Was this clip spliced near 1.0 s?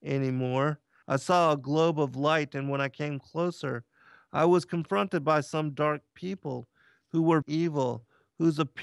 yes; 2 cuts; at 1.0 s, 7.4 s

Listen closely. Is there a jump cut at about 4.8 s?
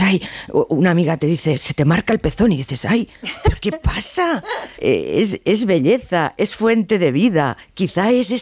yes; 1 cut; at 4.8 s

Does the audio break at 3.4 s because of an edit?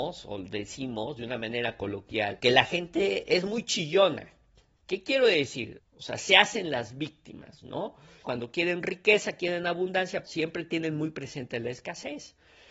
no; 3 cuts; at 5.8 s, 8.2 s, 10.2 s

